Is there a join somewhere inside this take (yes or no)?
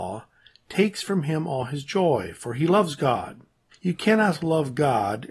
yes